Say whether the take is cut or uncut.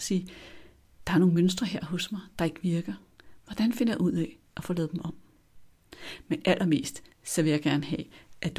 uncut